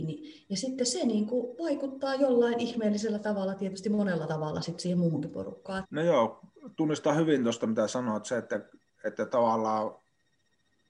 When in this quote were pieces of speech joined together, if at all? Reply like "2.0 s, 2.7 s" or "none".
5.8 s